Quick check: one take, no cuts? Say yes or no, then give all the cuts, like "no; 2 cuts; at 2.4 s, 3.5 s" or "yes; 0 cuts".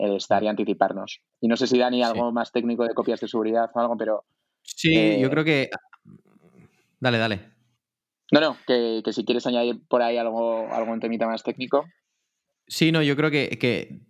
yes; 0 cuts